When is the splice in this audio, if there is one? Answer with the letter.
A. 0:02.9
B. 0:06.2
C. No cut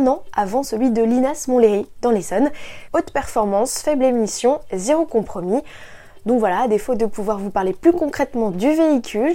A